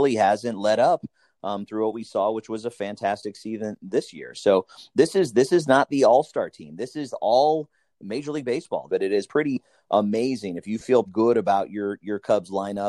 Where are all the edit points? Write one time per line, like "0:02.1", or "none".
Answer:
0:08.9
0:11.1